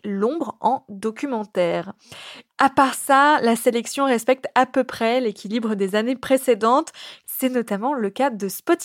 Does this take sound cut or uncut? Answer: cut